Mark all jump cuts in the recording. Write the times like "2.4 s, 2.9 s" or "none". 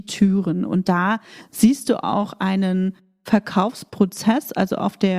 none